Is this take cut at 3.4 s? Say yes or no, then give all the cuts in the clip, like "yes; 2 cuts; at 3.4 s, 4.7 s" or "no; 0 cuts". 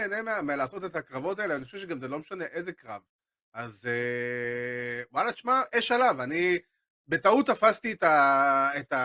no; 0 cuts